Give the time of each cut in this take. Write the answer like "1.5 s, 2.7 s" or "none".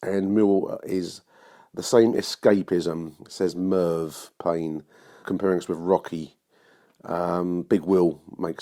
5.2 s